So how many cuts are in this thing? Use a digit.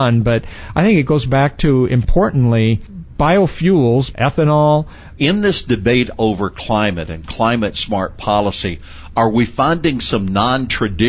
2